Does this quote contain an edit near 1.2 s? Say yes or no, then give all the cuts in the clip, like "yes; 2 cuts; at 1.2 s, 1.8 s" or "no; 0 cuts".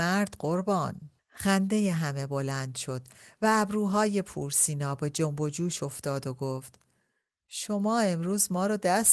yes; 1 cut; at 1.2 s